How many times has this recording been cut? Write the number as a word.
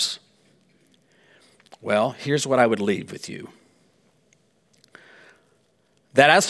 zero